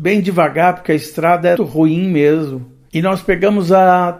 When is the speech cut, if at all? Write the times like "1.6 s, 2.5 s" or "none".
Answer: 1.6 s, 2.9 s